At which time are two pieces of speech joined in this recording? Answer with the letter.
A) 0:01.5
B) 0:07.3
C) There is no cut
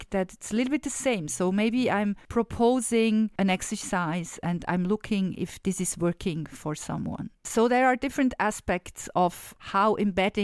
C